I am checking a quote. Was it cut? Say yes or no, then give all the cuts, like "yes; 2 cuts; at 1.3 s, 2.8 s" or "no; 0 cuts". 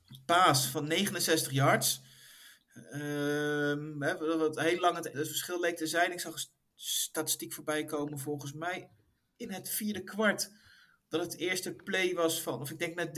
yes; 1 cut; at 5.1 s